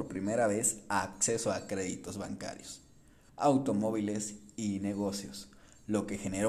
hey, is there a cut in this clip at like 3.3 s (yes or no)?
yes